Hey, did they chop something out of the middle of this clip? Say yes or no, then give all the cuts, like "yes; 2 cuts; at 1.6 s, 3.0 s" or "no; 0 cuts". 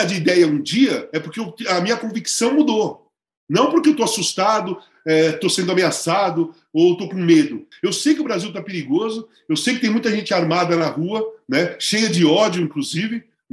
yes; 1 cut; at 7.7 s